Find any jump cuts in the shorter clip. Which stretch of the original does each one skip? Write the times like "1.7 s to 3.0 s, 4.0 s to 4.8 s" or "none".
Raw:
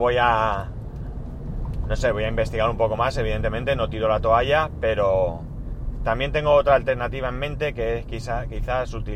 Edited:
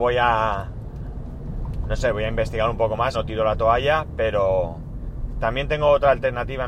3.1 s to 3.8 s